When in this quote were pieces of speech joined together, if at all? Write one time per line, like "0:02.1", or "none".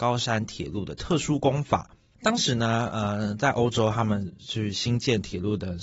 none